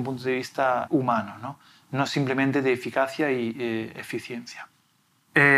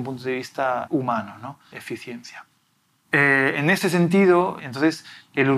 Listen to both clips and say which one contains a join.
second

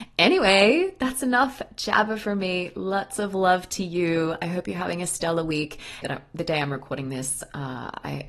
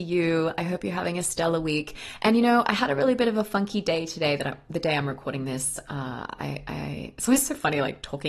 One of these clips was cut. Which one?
first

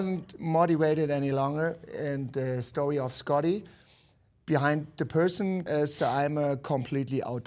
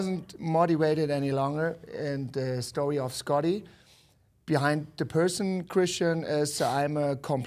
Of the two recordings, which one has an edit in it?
first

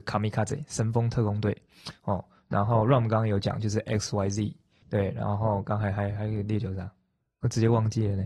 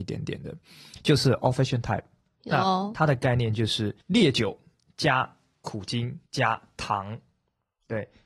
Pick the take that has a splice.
second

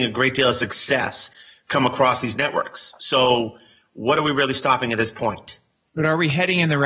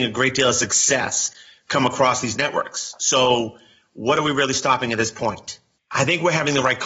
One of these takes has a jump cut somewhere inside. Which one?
second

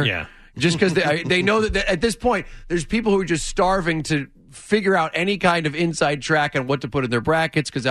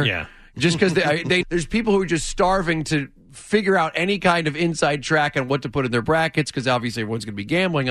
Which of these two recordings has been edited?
second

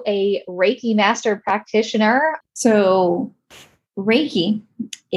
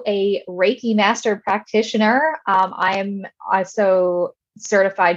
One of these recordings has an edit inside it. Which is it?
first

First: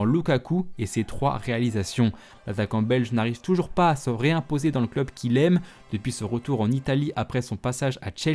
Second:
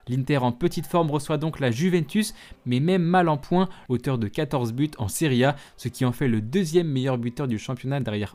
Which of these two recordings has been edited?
second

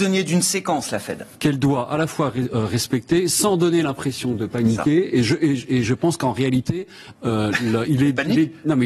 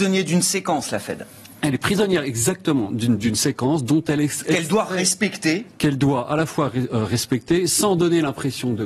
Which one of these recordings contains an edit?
first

